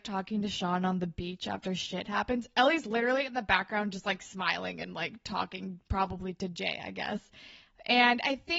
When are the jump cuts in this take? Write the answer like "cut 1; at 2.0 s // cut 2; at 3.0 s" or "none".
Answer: none